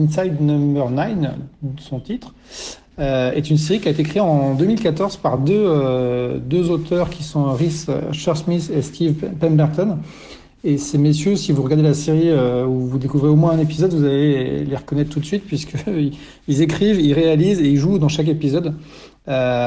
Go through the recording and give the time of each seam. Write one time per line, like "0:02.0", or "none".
none